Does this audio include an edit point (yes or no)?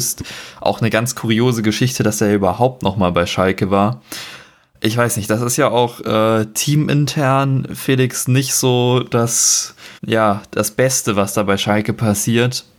yes